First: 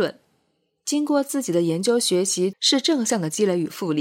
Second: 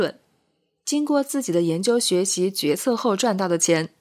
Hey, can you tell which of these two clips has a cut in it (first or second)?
first